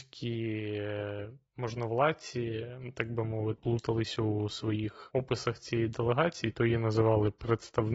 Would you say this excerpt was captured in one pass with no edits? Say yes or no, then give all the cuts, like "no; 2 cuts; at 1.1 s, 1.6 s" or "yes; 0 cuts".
no; 1 cut; at 3.6 s